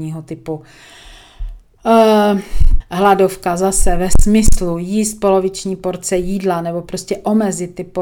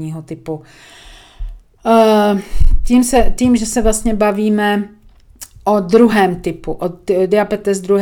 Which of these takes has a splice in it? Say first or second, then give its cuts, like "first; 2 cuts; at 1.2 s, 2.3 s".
first; 1 cut; at 2.8 s